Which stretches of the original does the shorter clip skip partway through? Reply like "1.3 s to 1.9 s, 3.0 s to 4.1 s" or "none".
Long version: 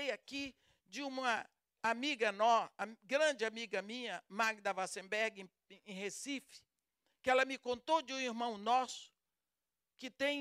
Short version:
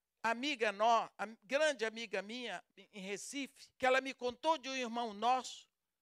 4.3 s to 5.6 s, 6.7 s to 7.2 s